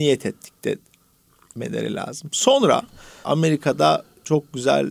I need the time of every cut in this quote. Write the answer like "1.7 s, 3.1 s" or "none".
3.2 s